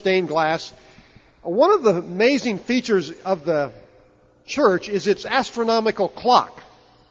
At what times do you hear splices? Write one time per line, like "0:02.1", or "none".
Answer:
none